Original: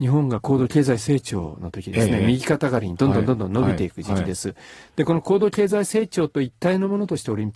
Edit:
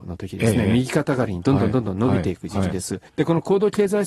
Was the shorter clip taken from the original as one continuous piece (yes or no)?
no